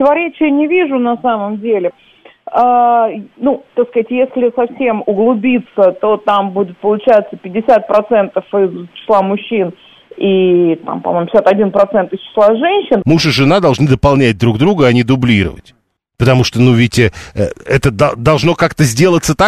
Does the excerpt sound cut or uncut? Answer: cut